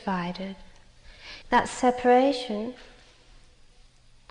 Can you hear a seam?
yes; 1 cut; at 1.4 s

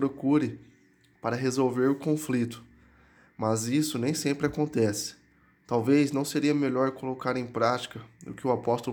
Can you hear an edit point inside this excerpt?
no; 0 cuts

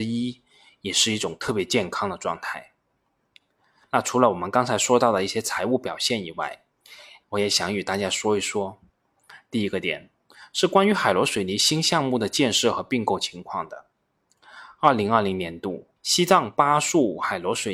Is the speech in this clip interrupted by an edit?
yes; 2 cuts; at 7.2 s, 16.0 s

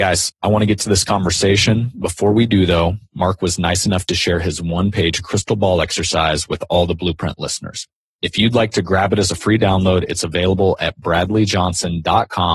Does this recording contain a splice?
no; 0 cuts

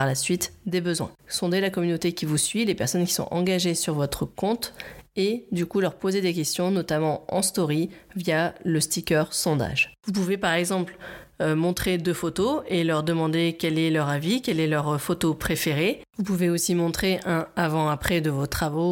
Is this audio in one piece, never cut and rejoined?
no; 1 cut; at 1.2 s

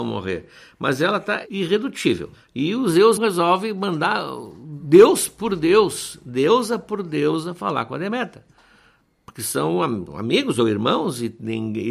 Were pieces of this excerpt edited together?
yes; 1 cut; at 3.2 s

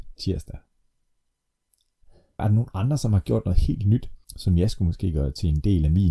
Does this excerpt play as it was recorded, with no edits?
no; 2 cuts; at 2.4 s, 4.2 s

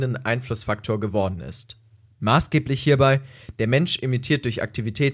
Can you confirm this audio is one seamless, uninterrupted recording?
yes; 0 cuts

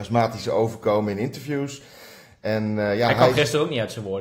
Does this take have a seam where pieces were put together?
no; 0 cuts

